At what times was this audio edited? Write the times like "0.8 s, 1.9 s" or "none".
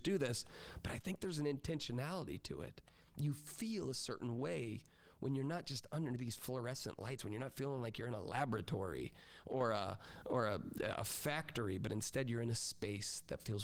none

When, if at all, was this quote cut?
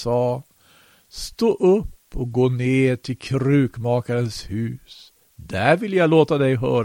none

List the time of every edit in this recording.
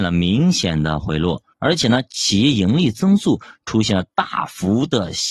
1.5 s

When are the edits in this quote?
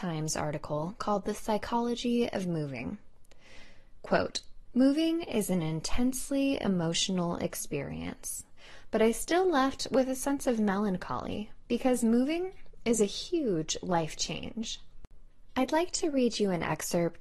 4.7 s, 8.9 s

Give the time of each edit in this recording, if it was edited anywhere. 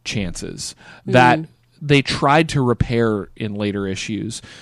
none

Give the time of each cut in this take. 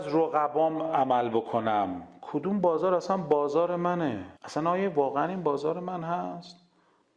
4.4 s

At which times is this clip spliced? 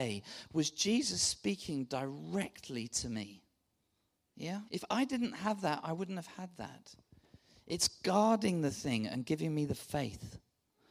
4.7 s

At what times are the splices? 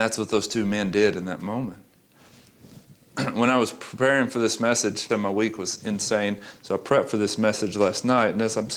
5.1 s

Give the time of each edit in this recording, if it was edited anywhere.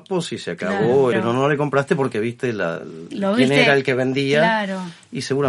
1.1 s

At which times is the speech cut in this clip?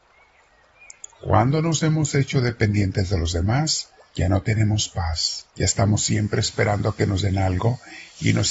4.1 s, 5.5 s

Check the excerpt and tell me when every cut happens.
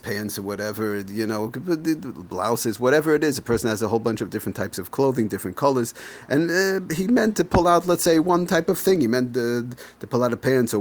none

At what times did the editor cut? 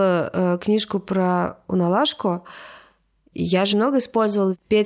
3.7 s

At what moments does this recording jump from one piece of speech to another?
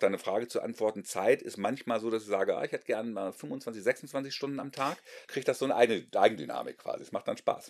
5.2 s

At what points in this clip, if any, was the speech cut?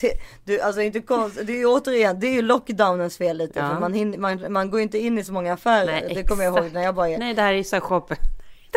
none

